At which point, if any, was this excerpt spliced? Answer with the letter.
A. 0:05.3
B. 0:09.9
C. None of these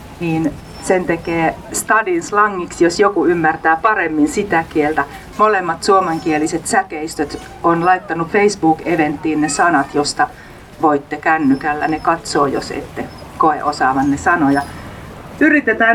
A